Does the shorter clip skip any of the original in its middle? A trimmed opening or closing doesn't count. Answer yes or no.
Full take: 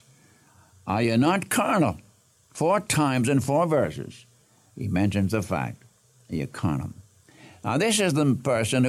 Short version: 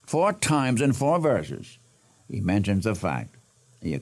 no